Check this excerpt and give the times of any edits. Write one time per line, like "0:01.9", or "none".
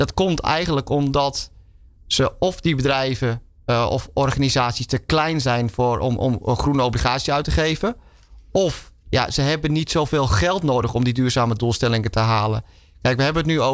none